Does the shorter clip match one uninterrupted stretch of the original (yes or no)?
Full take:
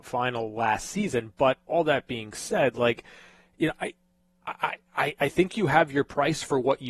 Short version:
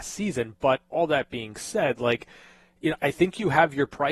no